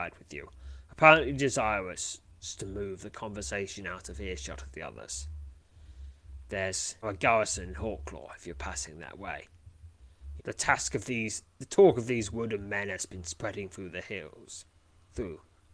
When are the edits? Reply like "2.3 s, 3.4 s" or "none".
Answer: 7.0 s, 10.4 s